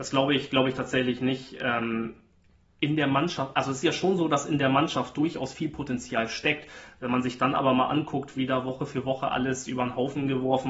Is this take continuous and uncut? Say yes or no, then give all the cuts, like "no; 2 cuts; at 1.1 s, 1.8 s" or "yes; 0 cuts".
yes; 0 cuts